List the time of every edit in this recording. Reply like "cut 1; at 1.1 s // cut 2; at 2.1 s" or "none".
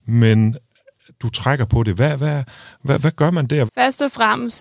cut 1; at 3.7 s